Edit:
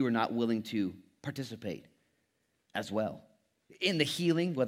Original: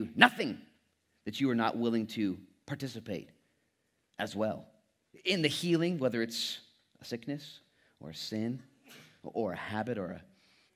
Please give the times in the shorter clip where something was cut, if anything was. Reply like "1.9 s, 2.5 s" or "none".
none